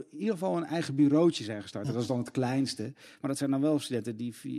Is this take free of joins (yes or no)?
yes